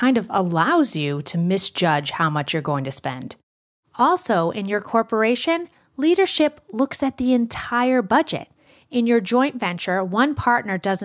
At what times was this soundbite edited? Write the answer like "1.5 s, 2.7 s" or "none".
none